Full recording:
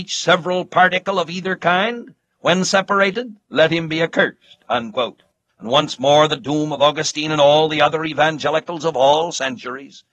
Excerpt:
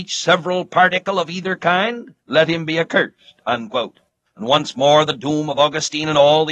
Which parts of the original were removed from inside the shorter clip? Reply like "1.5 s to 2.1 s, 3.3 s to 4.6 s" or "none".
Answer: 2.2 s to 3.4 s